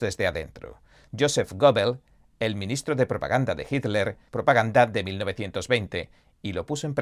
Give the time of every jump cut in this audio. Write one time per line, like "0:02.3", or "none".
0:01.1
0:04.3